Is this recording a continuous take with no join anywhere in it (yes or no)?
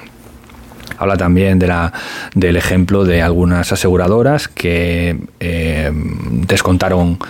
no